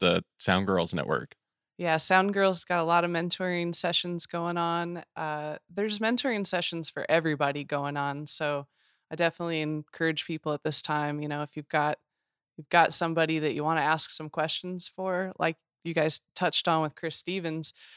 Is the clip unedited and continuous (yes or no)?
yes